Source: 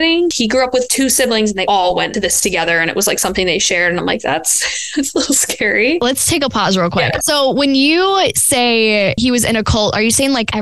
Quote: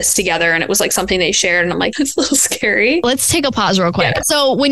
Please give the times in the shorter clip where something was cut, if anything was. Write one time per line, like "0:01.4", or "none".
0:01.9